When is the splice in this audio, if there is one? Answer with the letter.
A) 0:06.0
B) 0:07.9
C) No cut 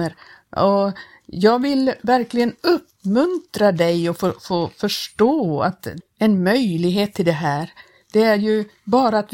A